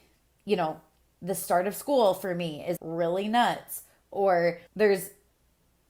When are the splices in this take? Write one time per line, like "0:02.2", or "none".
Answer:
0:02.8
0:04.7